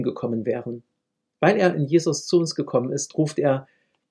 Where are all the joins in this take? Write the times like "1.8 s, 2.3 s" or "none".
1.3 s